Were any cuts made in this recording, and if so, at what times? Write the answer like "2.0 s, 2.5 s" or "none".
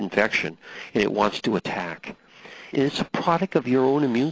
2.7 s